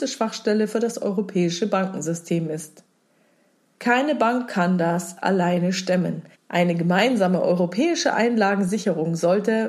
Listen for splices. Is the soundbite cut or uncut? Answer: cut